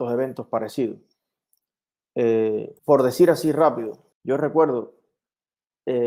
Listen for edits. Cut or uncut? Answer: cut